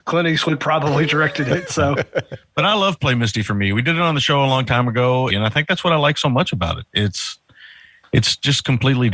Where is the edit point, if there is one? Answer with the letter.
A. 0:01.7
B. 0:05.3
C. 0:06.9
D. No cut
B